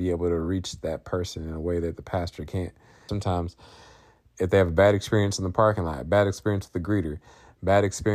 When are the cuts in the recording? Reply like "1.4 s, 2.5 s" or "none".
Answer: 3.1 s

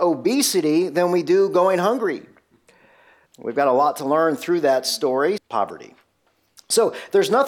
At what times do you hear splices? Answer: 3.3 s, 5.4 s

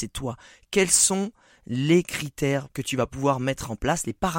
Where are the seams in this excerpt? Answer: 2.6 s

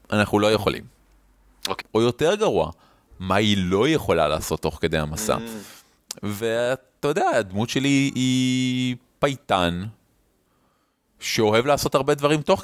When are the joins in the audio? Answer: 1.8 s

